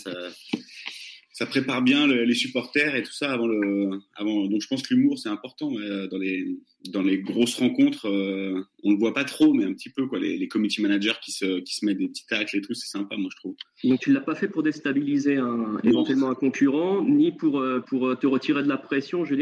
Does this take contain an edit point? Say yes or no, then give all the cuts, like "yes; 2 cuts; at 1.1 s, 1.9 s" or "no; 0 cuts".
no; 0 cuts